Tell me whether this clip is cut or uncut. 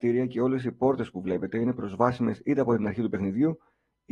uncut